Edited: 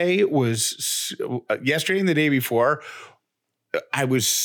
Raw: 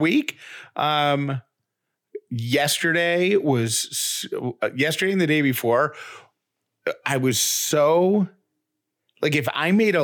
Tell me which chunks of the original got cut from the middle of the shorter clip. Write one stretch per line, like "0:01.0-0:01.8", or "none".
none

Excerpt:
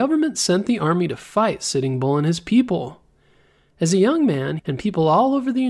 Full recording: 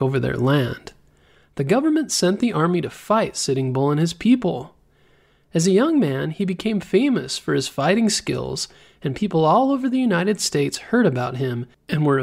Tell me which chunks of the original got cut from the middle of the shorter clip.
0:06.3-0:09.0

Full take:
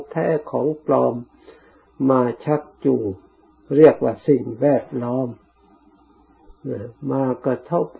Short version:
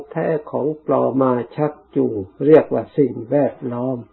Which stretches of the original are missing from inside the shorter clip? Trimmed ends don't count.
0:01.1-0:02.0
0:03.2-0:03.7

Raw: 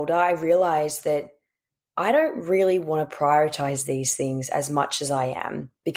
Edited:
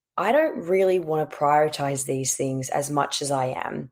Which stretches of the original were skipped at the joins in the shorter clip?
none

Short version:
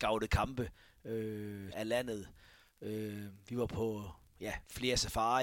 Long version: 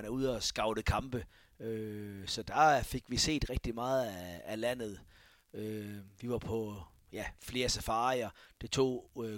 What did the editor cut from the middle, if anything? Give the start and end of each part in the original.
0:02.2-0:04.4

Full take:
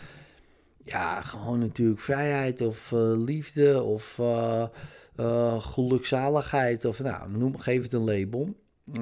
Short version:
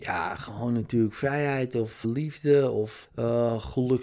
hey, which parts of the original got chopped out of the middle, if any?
0:02.9-0:03.2
0:04.2-0:05.0

